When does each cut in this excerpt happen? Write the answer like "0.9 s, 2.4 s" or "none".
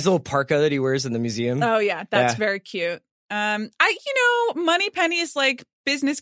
none